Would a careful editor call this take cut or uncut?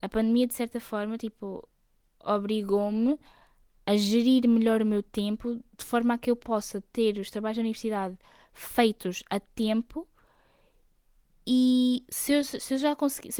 uncut